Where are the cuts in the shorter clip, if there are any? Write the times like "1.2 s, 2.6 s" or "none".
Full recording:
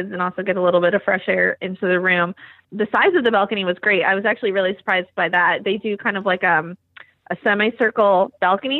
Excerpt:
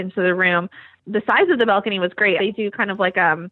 2.4 s